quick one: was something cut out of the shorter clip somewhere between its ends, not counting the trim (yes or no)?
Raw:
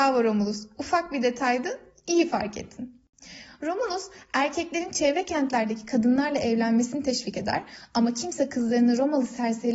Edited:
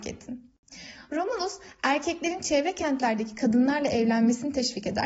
no